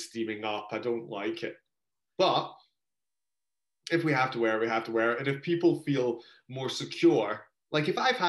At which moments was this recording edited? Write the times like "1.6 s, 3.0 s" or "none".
none